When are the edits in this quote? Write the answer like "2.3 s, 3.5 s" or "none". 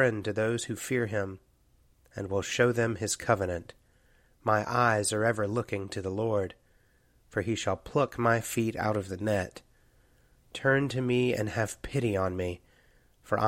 none